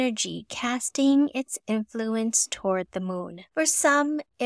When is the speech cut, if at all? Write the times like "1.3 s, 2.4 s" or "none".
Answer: 3.5 s

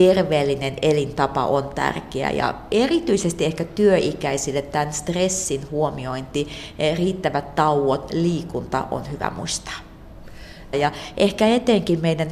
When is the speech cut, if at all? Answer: 10.7 s

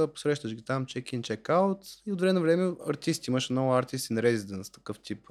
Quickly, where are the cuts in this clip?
none

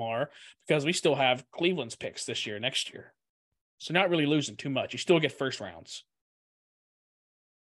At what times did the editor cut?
none

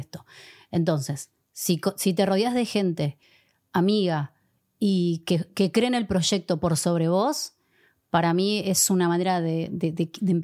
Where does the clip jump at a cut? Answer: none

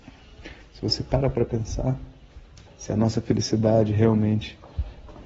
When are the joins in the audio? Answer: 2.7 s

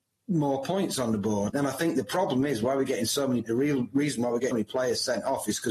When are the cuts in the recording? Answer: 1.5 s, 3.5 s, 4.5 s

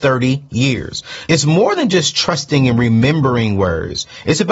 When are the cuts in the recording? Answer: 1.3 s

